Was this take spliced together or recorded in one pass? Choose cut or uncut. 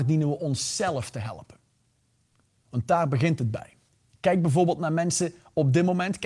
uncut